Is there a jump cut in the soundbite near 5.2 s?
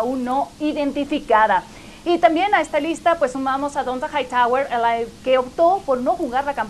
yes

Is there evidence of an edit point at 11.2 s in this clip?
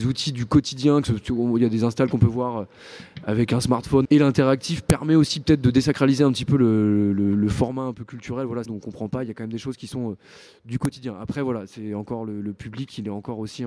no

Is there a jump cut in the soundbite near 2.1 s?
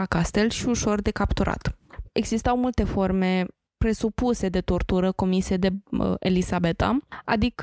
yes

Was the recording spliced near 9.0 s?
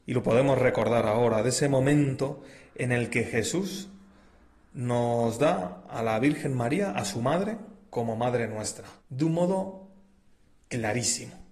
yes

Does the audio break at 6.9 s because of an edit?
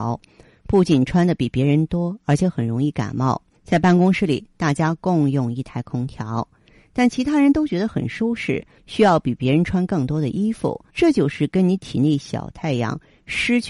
no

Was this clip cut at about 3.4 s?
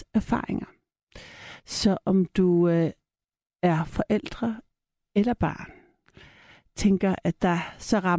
no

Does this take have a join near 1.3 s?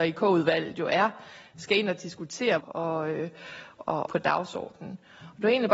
no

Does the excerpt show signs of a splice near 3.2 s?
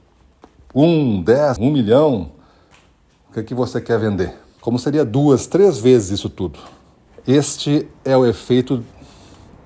no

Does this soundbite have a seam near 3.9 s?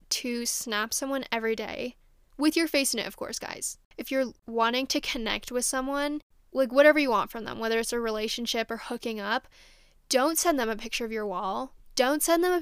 no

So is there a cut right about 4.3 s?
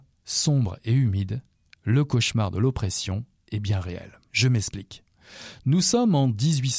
yes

